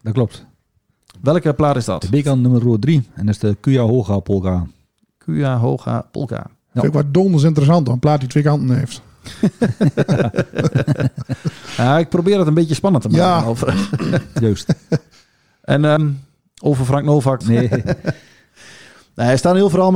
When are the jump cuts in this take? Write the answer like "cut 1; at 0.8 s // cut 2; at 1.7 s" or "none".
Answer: cut 1; at 16.0 s // cut 2; at 17.4 s